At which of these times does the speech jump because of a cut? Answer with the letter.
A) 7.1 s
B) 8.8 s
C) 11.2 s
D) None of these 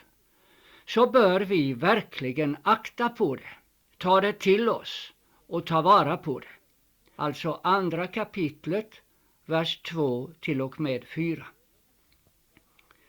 A